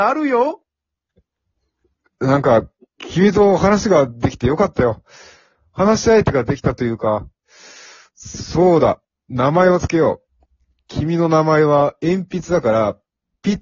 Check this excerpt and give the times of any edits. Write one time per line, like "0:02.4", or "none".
none

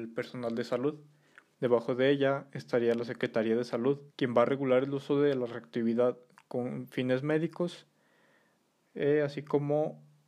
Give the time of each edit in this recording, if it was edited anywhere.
0:01.5
0:04.1

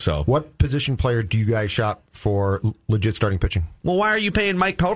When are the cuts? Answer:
0:03.8

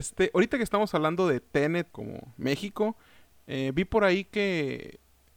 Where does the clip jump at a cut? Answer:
0:01.9

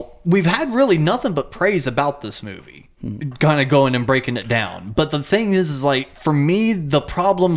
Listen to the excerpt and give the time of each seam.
none

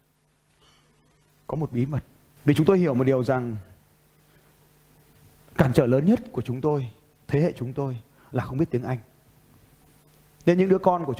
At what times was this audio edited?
0:02.4

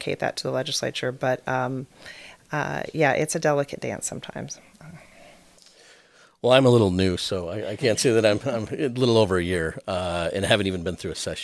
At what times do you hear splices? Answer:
none

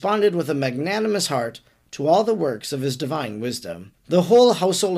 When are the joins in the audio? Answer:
0:03.9

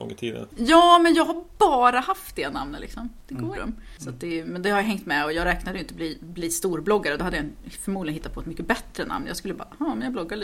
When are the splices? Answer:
0:03.5

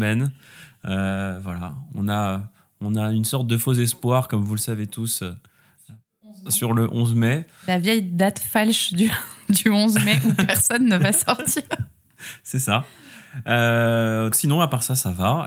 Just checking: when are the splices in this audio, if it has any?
0:14.3

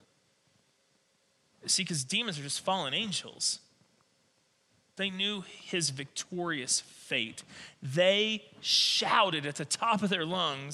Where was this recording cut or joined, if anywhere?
0:05.0

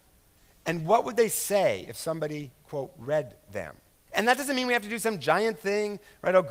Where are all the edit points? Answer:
0:04.1

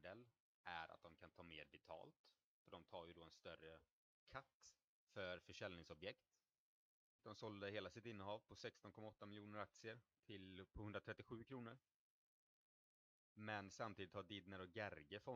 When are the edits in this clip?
0:07.2

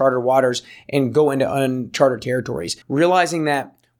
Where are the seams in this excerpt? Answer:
0:02.8

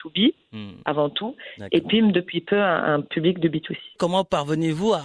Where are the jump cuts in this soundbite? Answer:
0:04.0

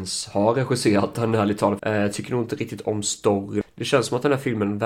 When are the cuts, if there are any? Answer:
0:01.8
0:03.6

